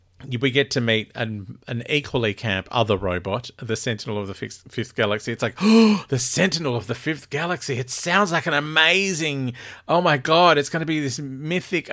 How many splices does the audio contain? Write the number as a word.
zero